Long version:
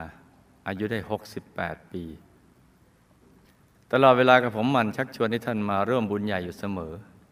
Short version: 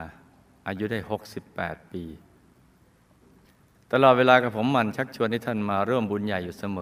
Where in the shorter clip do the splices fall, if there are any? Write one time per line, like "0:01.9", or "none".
none